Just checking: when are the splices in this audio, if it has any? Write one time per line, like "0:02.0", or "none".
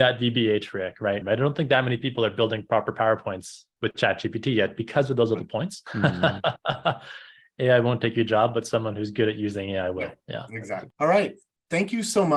0:01.2
0:05.9
0:10.9